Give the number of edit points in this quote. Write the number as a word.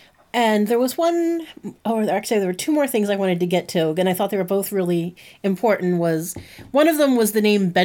zero